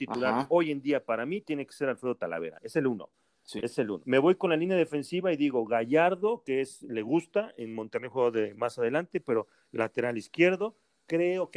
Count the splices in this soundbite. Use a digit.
1